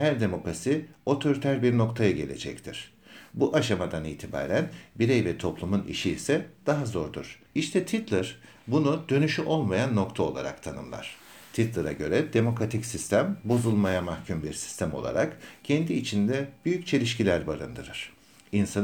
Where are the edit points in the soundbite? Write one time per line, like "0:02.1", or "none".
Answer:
0:07.5